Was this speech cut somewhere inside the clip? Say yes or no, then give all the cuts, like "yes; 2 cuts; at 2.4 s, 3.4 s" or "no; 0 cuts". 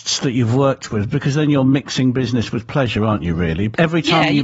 no; 0 cuts